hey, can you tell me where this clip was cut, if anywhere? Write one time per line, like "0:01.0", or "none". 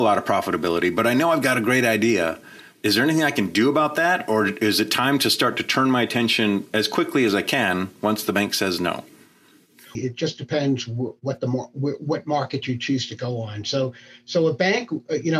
0:10.0